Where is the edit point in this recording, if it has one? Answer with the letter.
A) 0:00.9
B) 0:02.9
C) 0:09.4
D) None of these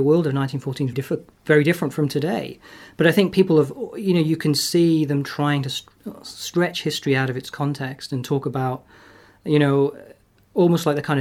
A